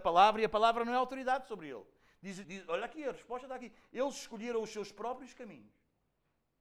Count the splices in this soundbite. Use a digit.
1